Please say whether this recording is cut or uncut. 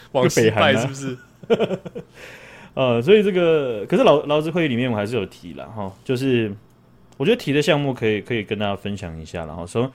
uncut